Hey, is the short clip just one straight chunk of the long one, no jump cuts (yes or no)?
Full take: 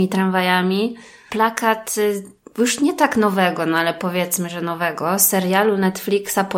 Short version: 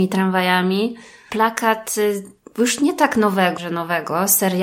no